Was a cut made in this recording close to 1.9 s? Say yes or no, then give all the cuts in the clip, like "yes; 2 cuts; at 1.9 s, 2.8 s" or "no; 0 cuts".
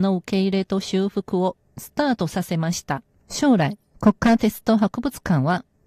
no; 1 cut; at 3.2 s